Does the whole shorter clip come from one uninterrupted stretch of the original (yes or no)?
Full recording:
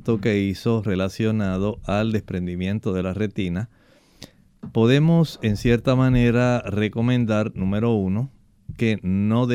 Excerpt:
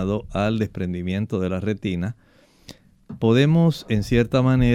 yes